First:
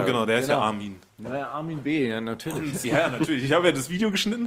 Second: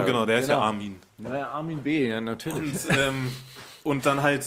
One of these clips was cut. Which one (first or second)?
first